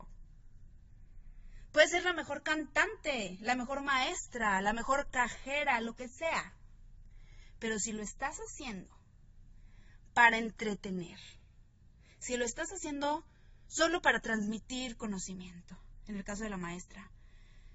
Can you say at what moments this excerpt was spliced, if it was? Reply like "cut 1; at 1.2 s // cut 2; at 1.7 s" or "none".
cut 1; at 1.7 s